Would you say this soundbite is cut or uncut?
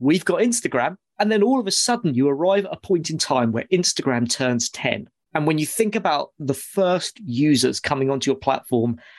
uncut